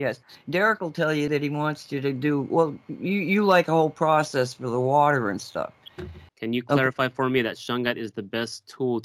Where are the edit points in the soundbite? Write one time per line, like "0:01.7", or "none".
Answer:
0:01.3
0:06.3